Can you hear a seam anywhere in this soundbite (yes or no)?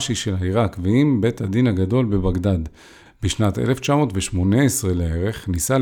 yes